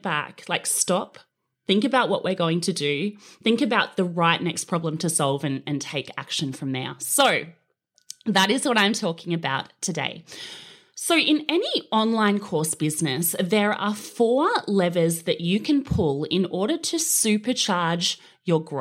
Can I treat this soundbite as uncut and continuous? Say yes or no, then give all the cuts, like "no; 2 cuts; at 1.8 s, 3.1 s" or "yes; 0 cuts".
yes; 0 cuts